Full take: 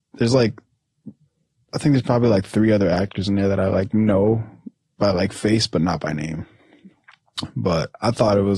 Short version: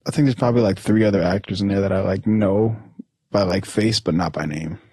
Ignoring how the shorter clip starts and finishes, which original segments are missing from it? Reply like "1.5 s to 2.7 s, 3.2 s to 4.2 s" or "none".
none

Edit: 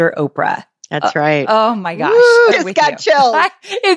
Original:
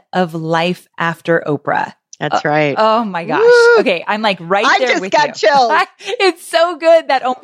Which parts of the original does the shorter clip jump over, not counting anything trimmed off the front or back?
3.8 s to 4.9 s

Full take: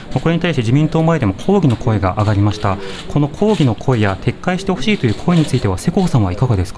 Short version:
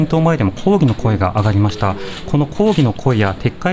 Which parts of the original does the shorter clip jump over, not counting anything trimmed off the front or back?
none

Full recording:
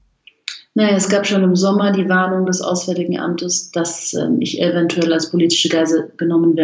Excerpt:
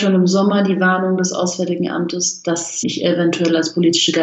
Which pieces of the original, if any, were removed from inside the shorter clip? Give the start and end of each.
4.1 s to 4.4 s

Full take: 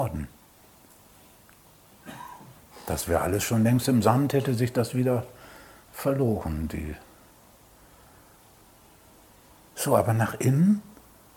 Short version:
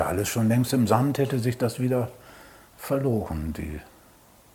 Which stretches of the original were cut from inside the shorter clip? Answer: none

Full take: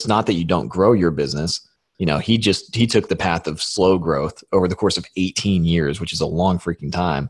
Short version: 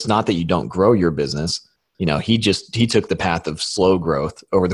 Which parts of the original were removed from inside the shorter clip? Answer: none

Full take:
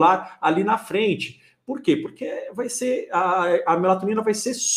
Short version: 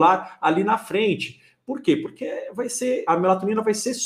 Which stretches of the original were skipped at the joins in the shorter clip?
3.1 s to 3.7 s

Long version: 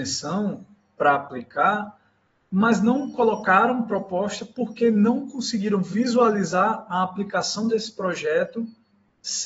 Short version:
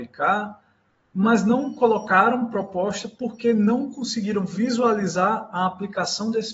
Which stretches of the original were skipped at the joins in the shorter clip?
none

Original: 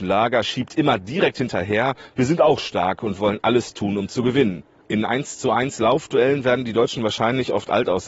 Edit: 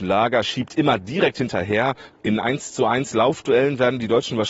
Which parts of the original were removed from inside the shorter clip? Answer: 2.1 s to 4.7 s

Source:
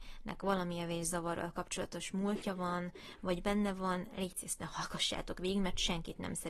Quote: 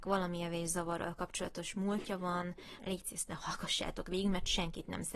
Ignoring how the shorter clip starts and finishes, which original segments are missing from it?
3.2 s to 4.1 s

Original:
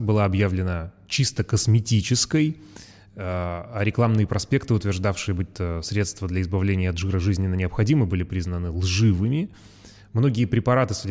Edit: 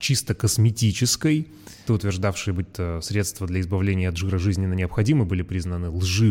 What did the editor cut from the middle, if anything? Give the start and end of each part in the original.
2.9 s to 4.7 s

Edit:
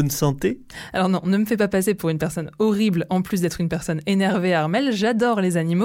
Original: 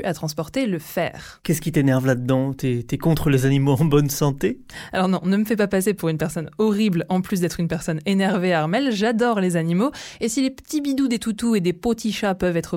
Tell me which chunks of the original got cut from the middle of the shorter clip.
none

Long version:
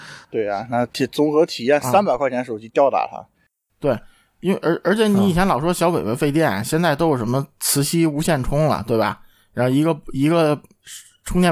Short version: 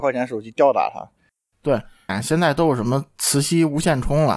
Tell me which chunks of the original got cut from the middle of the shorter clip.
4.3 s to 6.5 s

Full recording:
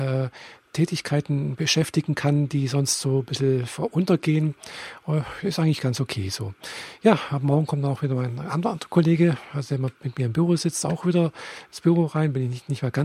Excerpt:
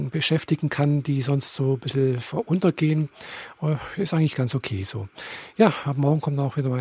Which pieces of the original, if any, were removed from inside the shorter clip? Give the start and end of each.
none

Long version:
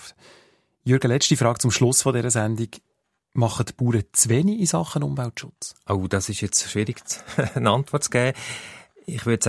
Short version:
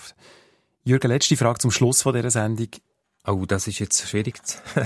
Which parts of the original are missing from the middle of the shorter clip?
3.2 s to 5.8 s

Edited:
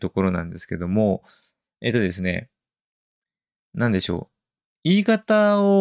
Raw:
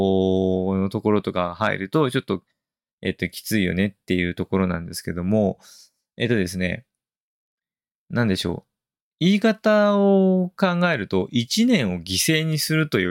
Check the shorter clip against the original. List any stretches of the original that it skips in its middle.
none

